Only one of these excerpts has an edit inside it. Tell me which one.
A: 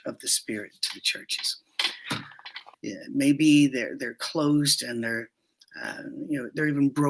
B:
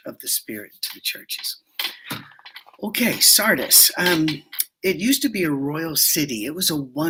A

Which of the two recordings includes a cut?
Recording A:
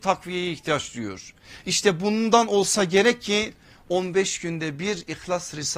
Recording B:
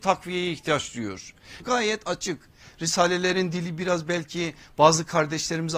B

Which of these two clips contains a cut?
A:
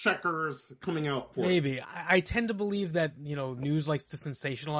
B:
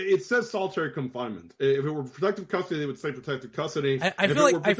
A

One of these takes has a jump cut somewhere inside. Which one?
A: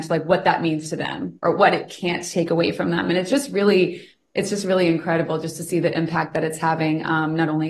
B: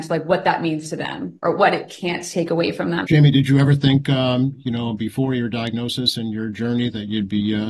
B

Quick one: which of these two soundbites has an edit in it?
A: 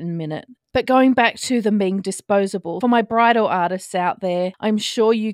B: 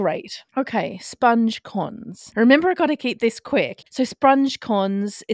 B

